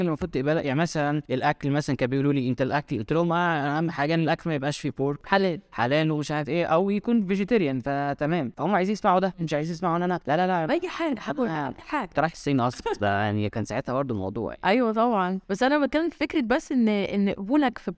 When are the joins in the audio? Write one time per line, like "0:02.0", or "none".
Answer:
none